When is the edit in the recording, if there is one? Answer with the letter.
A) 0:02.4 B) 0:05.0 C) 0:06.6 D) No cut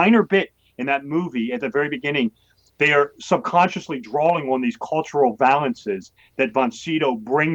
D